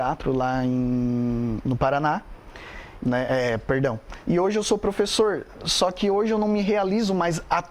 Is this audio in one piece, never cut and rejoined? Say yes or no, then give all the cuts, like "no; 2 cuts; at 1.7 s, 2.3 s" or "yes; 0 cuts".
no; 2 cuts; at 3.0 s, 4.2 s